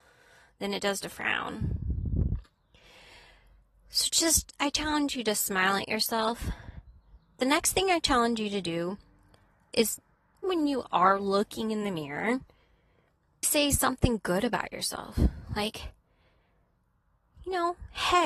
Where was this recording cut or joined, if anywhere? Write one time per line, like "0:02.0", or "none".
0:10.4
0:13.4